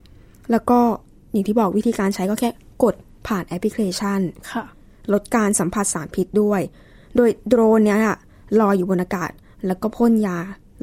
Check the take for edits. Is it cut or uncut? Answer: uncut